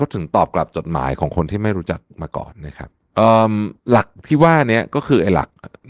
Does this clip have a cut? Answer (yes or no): yes